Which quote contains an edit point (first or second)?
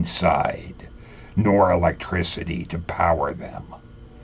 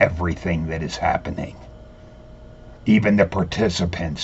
second